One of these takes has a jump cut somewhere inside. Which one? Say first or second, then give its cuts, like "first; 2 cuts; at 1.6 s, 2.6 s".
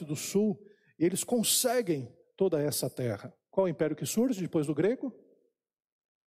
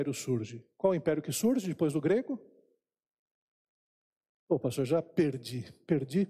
first; 2 cuts; at 2.2 s, 3.5 s